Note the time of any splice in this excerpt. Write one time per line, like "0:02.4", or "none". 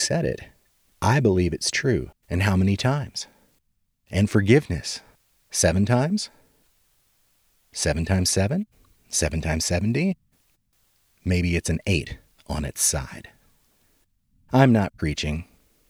0:02.1